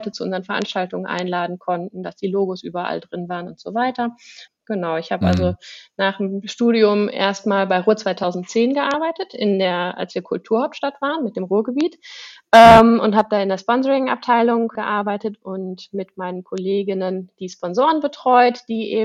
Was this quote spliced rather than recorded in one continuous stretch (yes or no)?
yes